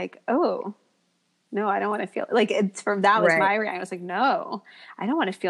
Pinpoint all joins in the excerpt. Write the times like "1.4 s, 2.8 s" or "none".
none

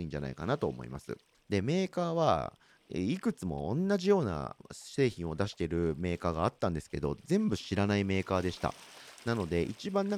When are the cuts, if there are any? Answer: 1.3 s

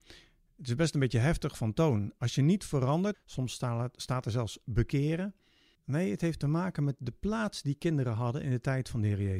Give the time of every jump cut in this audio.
3.1 s, 5.7 s

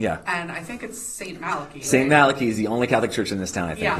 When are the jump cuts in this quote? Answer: none

